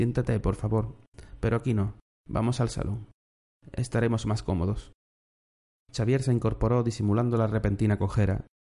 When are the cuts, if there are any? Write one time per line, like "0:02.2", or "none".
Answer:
none